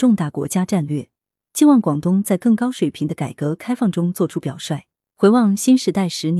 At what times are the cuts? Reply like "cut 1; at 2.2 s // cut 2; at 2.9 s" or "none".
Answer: cut 1; at 5.0 s